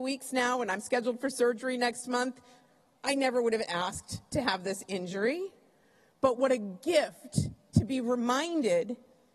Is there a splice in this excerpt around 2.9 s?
yes; 1 cut; at 2.9 s

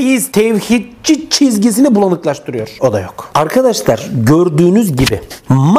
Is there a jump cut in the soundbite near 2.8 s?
yes; 1 cut; at 2.8 s

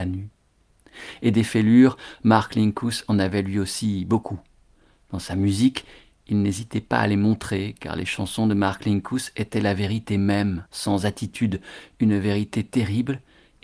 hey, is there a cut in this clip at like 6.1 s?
no; 1 cut; at 10.7 s

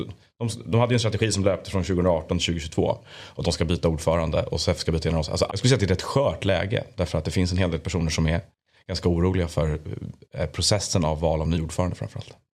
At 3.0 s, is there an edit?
yes; 2 cuts; at 3.0 s, 5.5 s

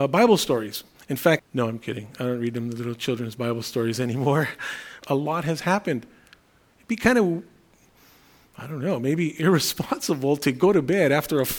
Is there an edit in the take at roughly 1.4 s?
yes; 2 cuts; at 1.4 s, 5.0 s

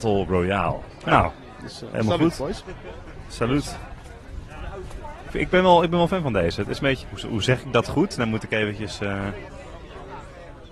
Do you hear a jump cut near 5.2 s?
no; 1 cut; at 7.0 s

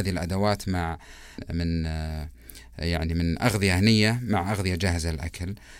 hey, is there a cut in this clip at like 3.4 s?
no; 1 cut; at 1.4 s

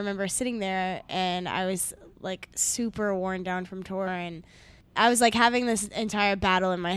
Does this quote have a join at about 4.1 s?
yes; 1 cut; at 4.1 s

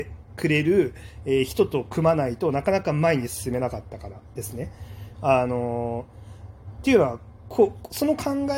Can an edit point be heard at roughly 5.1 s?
yes; 1 cut; at 5.1 s

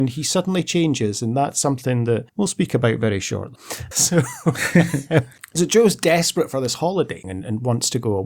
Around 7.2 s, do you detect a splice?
yes; 2 cuts; at 3.9 s, 7.2 s

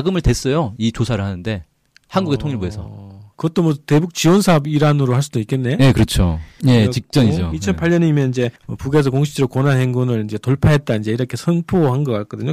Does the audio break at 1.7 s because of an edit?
no; 2 cuts; at 6.6 s, 8.6 s

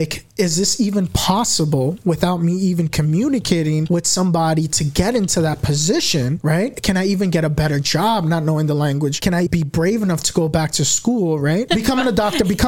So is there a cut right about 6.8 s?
no; 2 cuts; at 9.5 s, 11.7 s

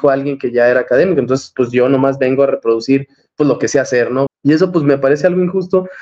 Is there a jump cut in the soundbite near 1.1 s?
no; 1 cut; at 4.3 s

